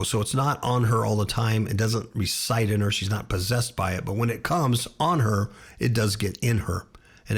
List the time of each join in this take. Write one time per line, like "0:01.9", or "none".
none